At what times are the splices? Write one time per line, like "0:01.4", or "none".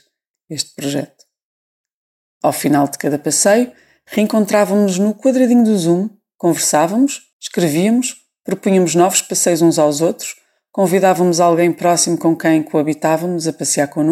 0:02.3
0:07.3